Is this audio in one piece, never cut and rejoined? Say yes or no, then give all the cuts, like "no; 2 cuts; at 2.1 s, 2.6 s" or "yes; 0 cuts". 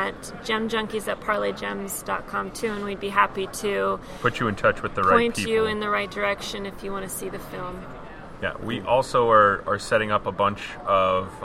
yes; 0 cuts